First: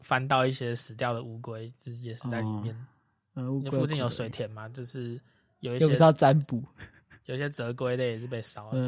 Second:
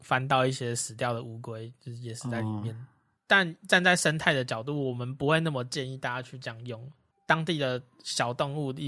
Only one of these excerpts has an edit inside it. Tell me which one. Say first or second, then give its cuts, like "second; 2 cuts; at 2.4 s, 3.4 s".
second; 2 cuts; at 3.2 s, 7.1 s